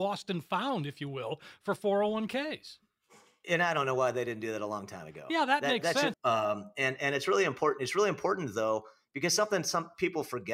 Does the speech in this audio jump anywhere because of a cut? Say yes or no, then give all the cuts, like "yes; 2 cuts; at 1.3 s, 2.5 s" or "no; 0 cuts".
yes; 1 cut; at 6.1 s